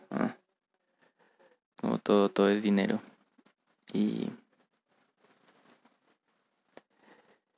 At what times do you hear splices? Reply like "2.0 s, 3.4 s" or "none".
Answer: none

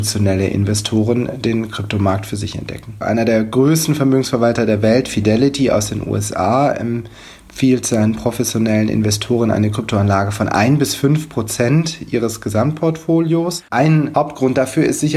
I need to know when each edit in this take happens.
13.7 s

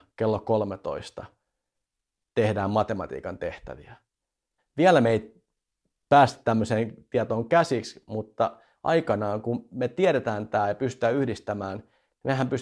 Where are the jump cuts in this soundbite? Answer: 4.6 s

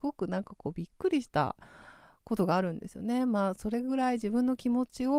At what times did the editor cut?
none

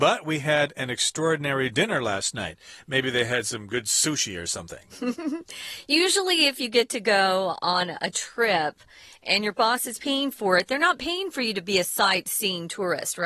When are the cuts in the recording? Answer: none

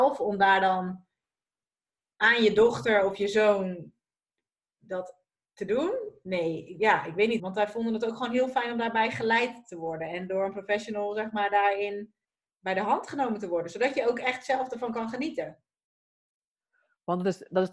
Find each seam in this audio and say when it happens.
7.4 s

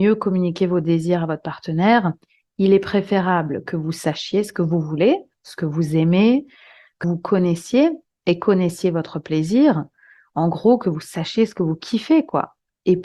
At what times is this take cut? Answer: 7.0 s

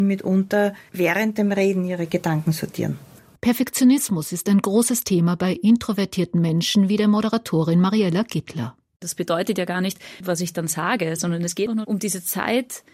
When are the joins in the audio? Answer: 3.4 s, 10.2 s, 11.7 s

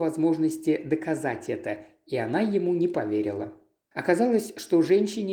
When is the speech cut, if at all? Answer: 3.9 s

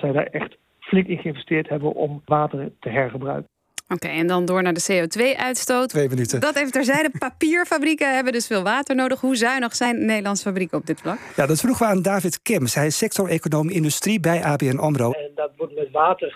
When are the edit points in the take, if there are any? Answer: 5.9 s, 15.1 s

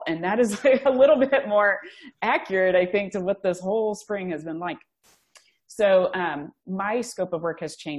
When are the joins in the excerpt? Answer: none

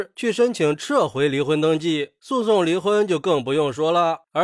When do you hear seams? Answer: none

